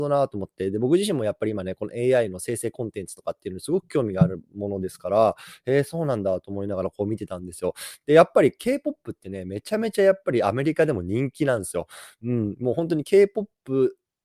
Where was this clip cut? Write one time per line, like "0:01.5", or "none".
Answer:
none